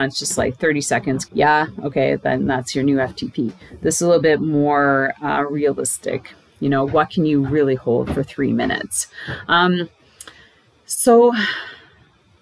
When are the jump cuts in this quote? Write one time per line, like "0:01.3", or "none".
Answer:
0:01.2